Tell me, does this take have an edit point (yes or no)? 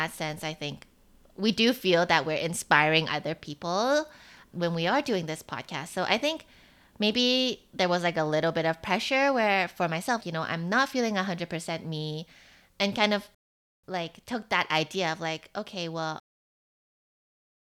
yes